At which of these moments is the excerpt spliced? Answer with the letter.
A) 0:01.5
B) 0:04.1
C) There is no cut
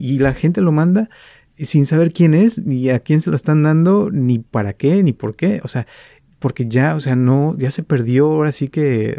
C